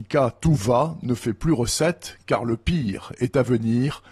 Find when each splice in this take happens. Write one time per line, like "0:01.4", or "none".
none